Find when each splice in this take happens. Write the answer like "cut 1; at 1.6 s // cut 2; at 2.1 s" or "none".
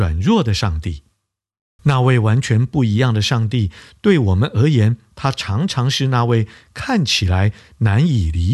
cut 1; at 1.8 s